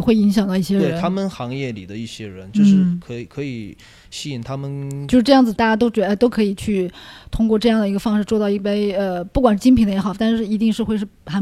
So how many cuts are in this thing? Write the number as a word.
one